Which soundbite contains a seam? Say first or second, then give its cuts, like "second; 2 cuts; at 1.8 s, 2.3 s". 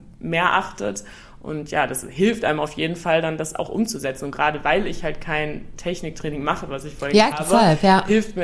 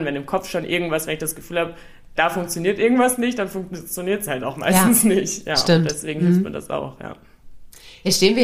first; 1 cut; at 7.3 s